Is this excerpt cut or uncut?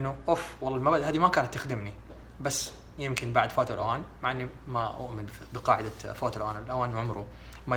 uncut